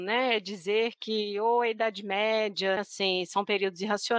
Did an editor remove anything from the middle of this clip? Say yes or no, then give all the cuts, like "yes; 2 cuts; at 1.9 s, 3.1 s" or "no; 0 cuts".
yes; 1 cut; at 2.8 s